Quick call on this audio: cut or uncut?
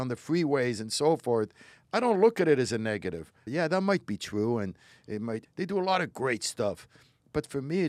cut